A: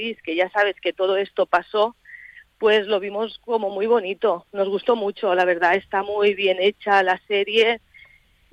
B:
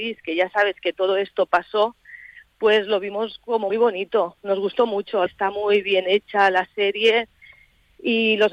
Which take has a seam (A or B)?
B